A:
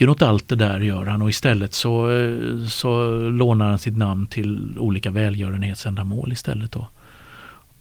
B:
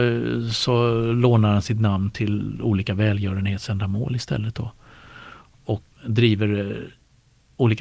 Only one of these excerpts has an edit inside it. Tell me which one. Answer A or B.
B